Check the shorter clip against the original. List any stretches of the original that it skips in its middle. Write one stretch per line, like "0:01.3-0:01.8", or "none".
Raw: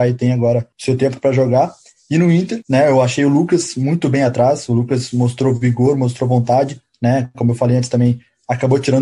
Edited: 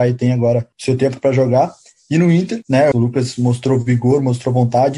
0:02.9-0:04.7